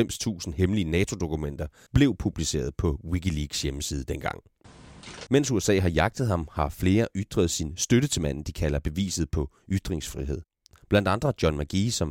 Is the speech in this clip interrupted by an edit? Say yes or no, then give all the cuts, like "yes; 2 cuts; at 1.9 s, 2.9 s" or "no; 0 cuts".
yes; 2 cuts; at 1.9 s, 5.3 s